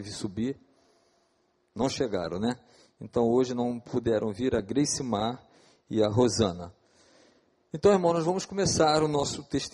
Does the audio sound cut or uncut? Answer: uncut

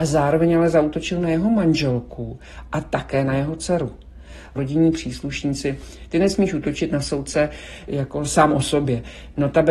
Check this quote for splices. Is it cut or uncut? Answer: cut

